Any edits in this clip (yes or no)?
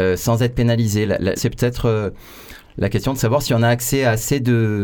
yes